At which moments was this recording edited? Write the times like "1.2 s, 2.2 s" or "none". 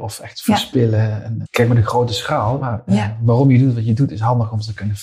1.4 s, 2.6 s